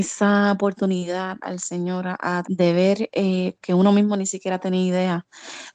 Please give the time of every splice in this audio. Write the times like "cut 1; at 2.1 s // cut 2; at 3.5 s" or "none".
cut 1; at 2.4 s // cut 2; at 3.6 s